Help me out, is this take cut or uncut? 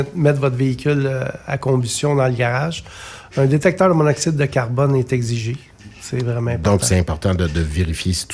cut